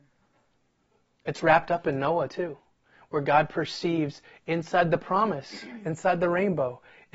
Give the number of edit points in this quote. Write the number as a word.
zero